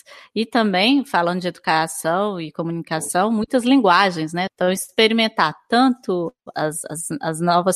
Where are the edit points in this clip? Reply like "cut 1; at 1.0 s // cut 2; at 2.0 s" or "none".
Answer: cut 1; at 4.5 s // cut 2; at 6.5 s